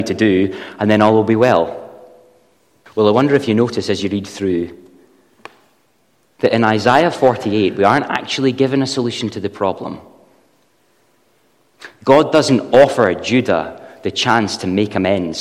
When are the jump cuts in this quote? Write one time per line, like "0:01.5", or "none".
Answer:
0:02.9